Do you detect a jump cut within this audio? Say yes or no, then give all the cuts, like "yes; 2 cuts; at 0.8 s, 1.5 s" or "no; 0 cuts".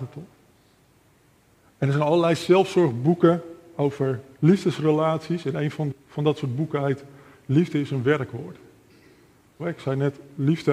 yes; 2 cuts; at 5.9 s, 9.6 s